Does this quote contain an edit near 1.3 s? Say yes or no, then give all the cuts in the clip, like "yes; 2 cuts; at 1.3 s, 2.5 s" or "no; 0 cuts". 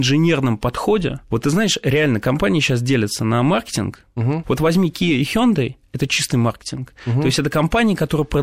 no; 1 cut; at 4.4 s